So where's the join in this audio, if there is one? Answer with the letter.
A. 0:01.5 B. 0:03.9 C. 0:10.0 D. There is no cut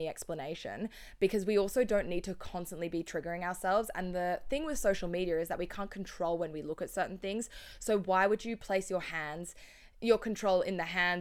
D